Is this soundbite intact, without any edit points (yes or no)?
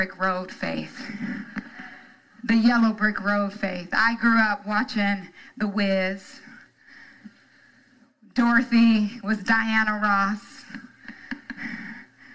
yes